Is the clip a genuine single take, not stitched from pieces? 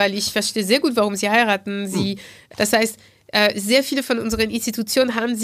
no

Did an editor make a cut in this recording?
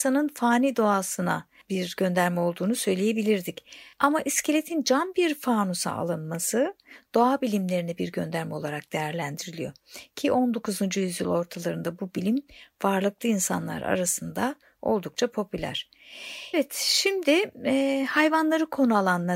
yes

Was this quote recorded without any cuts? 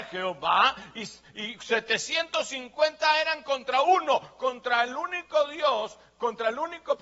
yes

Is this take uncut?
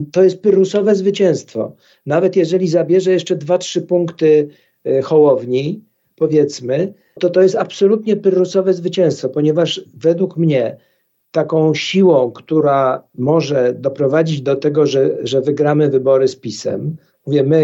no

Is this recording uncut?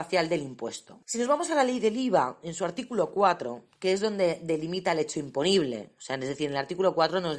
no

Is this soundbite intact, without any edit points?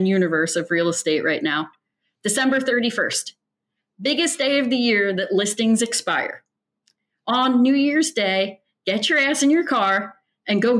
yes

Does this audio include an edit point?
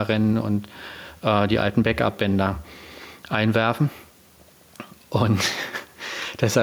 no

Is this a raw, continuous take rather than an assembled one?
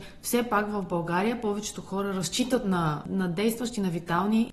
yes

